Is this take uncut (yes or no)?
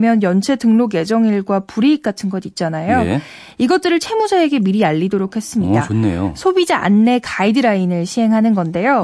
yes